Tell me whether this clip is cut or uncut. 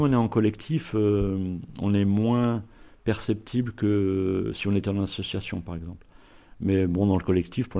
uncut